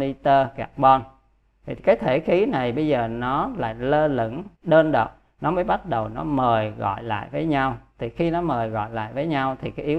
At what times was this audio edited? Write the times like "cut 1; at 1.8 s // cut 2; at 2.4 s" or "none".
cut 1; at 1.8 s // cut 2; at 4.5 s